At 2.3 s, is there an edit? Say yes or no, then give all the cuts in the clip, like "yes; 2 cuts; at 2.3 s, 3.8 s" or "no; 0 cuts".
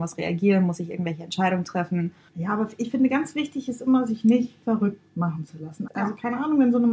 yes; 2 cuts; at 2.3 s, 5.9 s